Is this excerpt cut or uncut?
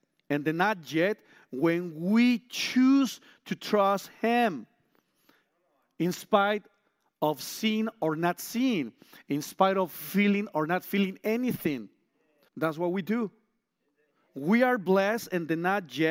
cut